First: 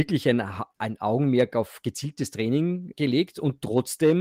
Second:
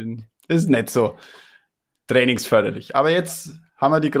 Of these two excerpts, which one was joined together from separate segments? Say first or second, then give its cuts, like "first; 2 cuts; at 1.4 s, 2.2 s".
first; 1 cut; at 2.9 s